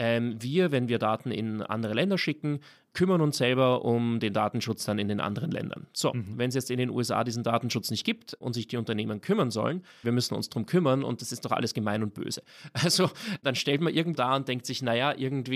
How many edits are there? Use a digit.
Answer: 2